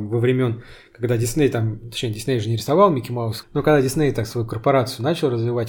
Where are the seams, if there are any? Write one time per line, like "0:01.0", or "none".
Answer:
0:03.4